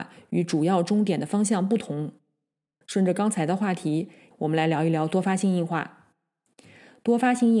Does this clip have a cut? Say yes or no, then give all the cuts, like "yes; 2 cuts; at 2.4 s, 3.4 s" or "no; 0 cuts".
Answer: yes; 2 cuts; at 2.8 s, 4.3 s